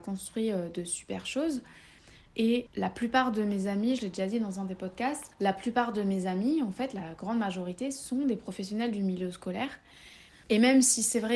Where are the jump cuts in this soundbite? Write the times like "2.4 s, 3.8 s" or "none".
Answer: 5.3 s, 10.3 s